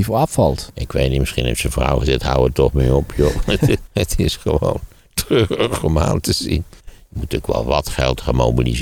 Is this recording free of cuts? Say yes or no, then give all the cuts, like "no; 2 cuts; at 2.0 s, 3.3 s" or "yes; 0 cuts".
no; 2 cuts; at 3.9 s, 6.8 s